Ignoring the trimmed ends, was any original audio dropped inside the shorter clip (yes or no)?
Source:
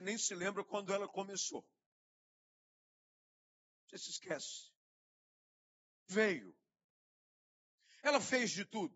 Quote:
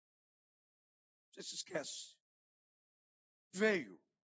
no